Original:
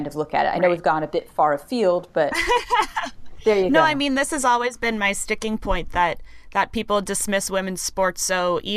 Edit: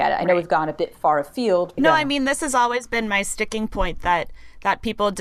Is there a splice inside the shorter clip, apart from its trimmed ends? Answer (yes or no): yes